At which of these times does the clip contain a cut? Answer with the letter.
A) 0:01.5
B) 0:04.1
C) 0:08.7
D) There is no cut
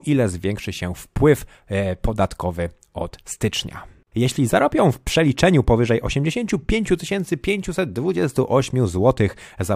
B